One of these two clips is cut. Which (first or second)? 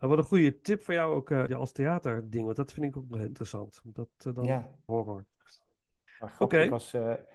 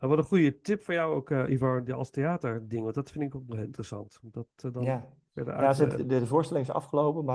first